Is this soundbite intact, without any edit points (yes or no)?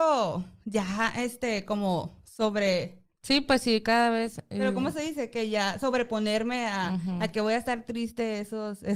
yes